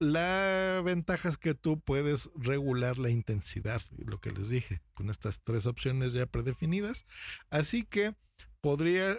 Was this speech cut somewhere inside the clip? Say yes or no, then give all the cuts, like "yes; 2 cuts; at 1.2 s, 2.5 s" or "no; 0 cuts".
no; 0 cuts